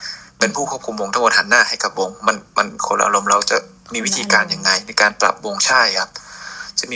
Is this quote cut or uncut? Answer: uncut